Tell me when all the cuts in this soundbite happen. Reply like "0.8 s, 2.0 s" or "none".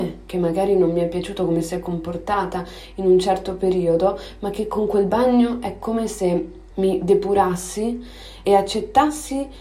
6.7 s, 8.4 s